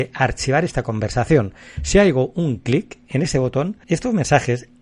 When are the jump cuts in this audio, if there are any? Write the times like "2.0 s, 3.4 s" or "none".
3.8 s